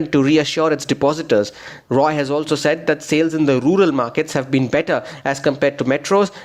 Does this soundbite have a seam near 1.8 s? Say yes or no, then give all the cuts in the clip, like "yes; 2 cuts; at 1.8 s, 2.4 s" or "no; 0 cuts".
yes; 1 cut; at 1.8 s